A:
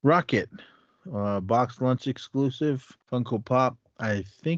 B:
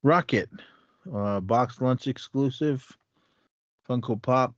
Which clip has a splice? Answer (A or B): A